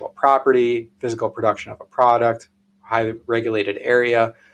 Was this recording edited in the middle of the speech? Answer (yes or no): no